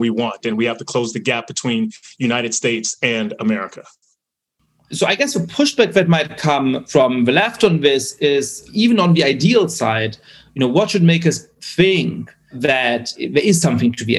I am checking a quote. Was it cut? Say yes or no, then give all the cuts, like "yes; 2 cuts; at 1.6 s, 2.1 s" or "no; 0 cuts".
no; 0 cuts